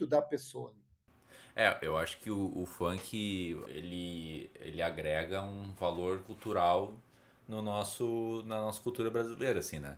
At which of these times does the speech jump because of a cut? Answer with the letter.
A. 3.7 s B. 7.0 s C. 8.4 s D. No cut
A